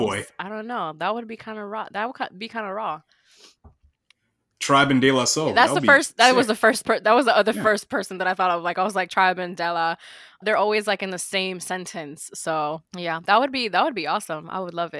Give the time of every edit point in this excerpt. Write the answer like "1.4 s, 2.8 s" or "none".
10.4 s, 12.9 s